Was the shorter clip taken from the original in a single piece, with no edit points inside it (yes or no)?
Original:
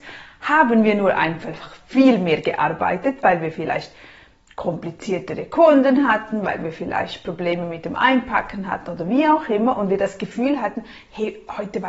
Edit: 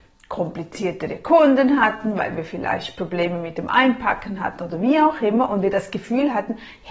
yes